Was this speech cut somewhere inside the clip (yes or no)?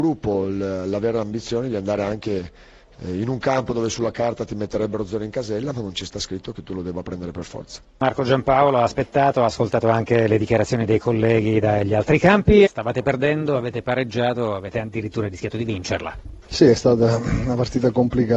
yes